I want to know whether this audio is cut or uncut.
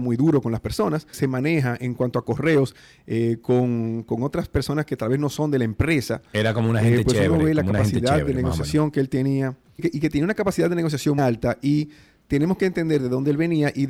cut